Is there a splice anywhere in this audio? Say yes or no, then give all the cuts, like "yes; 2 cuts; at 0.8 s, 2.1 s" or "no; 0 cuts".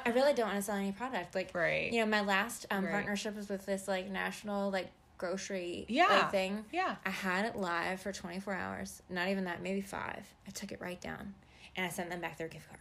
yes; 1 cut; at 10.4 s